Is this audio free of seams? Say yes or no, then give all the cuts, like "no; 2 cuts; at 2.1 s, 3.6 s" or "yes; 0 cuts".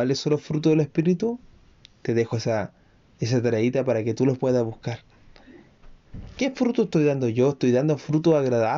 yes; 0 cuts